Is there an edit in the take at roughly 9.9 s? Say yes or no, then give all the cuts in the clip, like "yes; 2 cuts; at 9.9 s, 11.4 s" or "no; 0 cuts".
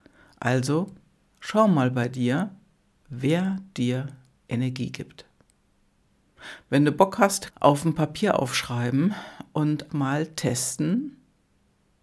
yes; 2 cuts; at 7.5 s, 9.9 s